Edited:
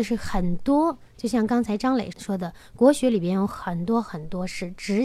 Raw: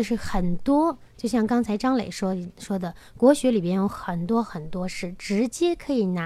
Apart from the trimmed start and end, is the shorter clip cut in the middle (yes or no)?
yes